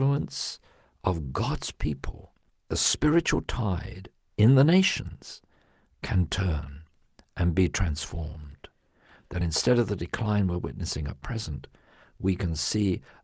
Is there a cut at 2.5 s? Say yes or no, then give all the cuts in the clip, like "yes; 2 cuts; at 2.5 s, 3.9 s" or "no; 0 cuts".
yes; 1 cut; at 2.5 s